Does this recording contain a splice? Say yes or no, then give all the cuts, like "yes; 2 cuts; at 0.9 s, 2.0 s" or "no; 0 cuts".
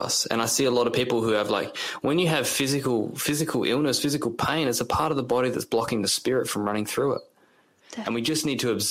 no; 0 cuts